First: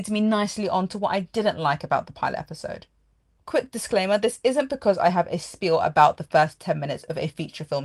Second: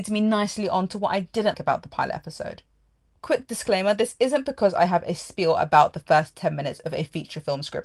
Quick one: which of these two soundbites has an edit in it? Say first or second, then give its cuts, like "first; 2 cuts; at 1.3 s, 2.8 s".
second; 1 cut; at 1.5 s